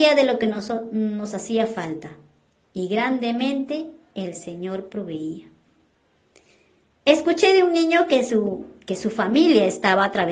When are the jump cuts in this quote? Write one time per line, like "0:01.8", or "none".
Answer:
none